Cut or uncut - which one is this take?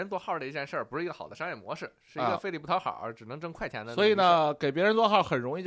uncut